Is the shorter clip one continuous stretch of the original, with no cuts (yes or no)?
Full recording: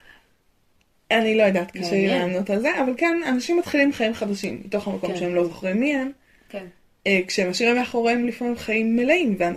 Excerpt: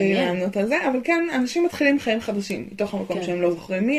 yes